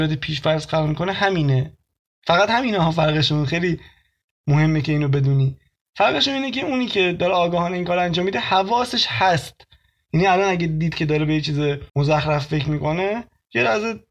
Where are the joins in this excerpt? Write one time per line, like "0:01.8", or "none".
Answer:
0:11.9